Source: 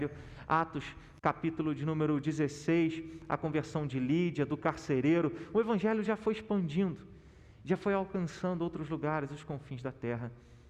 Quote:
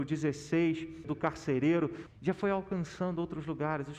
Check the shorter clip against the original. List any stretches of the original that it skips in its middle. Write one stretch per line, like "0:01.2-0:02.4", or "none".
0:03.2-0:04.5
0:05.5-0:07.5